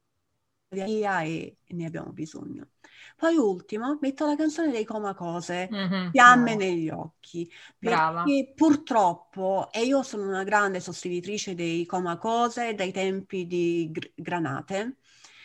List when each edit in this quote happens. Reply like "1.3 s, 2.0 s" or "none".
none